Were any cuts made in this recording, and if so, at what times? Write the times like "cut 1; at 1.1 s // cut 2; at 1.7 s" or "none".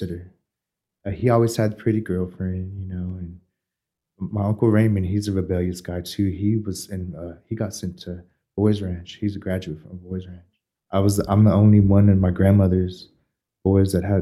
none